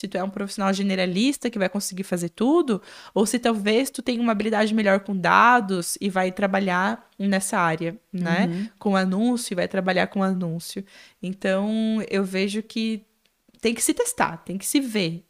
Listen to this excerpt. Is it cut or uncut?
uncut